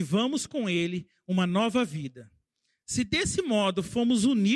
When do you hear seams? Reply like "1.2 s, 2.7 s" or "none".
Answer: none